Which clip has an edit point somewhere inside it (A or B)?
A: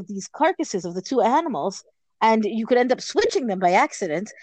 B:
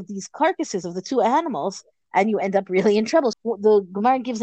B